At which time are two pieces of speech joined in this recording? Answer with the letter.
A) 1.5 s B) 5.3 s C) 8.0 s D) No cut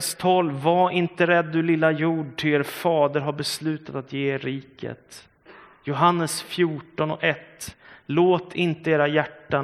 D